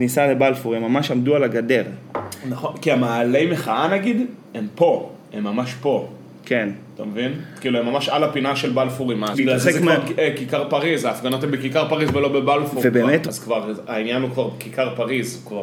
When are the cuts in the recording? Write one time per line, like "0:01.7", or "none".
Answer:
0:09.3
0:13.2